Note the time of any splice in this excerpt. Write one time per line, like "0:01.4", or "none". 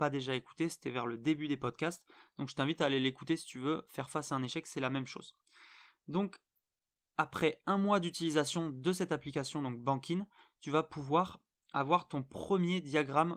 none